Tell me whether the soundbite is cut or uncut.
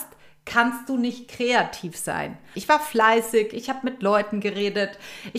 cut